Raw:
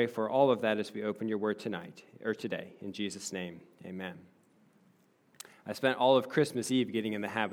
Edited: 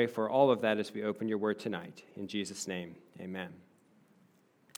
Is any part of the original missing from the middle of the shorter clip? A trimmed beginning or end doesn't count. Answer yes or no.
yes